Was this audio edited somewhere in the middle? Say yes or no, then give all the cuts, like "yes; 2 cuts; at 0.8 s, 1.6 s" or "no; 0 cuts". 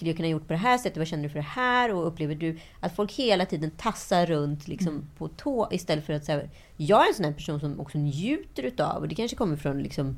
no; 0 cuts